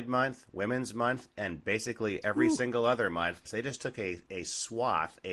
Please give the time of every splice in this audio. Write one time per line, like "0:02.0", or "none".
0:03.5